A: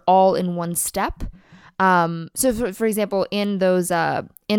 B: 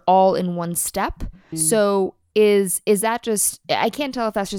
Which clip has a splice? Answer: B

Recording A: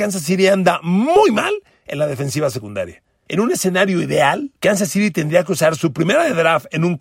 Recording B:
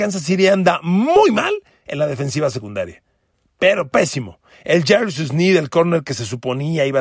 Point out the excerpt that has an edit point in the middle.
A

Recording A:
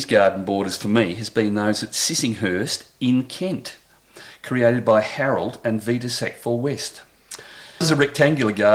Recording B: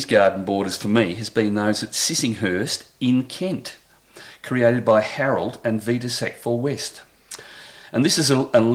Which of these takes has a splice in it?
A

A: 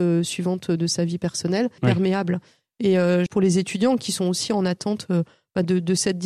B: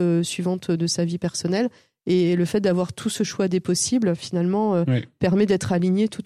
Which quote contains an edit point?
A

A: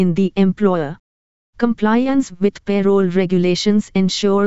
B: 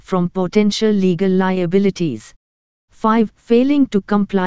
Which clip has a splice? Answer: B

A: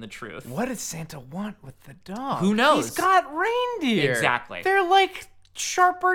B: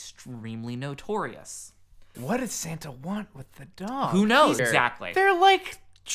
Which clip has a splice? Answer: B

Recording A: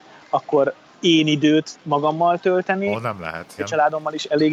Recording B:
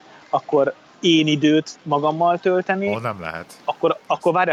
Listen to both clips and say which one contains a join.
A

